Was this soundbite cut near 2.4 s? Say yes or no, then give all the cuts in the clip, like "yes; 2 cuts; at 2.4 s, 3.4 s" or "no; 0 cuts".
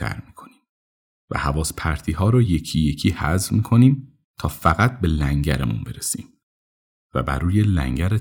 no; 0 cuts